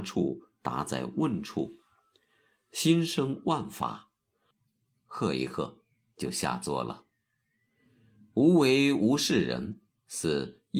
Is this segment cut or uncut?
cut